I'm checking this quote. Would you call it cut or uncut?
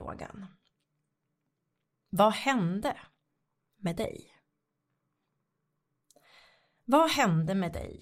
uncut